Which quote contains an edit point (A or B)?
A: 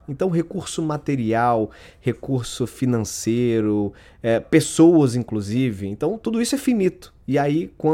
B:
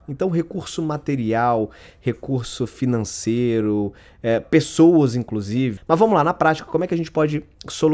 B